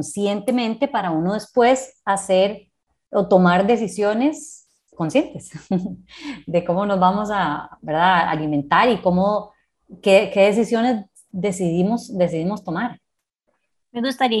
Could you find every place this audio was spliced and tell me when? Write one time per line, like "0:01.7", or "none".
none